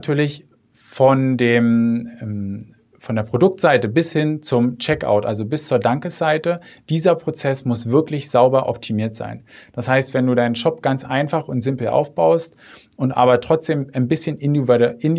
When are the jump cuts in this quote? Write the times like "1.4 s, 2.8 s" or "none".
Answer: none